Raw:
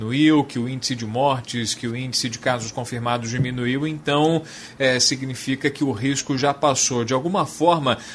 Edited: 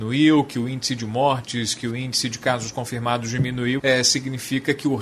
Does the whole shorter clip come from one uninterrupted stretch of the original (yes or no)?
no